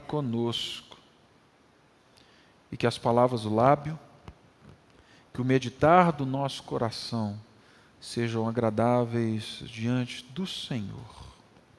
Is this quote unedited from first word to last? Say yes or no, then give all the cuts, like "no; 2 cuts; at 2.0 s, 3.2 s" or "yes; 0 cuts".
yes; 0 cuts